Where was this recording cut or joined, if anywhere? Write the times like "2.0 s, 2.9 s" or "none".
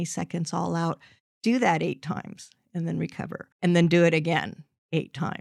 3.5 s